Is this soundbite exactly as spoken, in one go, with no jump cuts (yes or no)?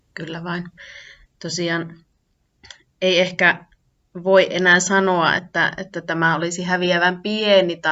yes